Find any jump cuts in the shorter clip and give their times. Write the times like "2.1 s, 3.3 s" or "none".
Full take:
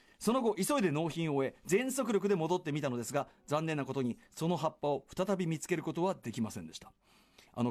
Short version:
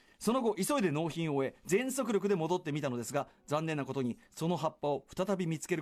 none